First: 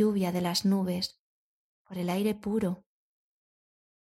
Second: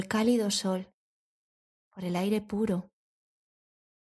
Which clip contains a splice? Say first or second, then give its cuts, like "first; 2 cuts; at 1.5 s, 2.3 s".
first; 1 cut; at 1.7 s